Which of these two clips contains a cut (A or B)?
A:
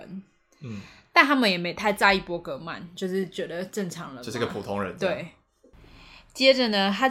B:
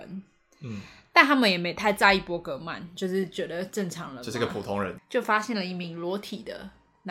B